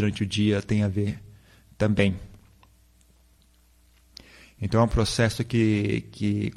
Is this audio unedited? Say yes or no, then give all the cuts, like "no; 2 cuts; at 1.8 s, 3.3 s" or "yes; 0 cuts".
yes; 0 cuts